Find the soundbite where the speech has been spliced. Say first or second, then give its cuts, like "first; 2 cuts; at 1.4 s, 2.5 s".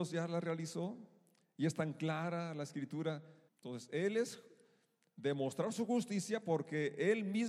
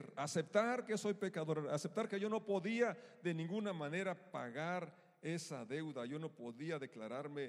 first; 1 cut; at 3.5 s